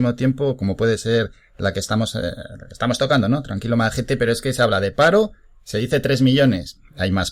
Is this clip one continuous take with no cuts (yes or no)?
yes